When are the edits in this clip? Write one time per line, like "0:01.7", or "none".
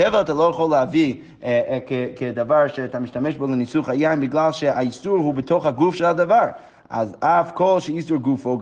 none